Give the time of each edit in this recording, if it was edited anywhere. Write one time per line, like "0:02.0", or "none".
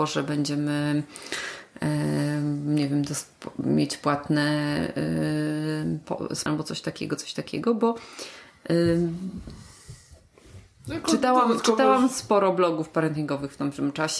0:06.5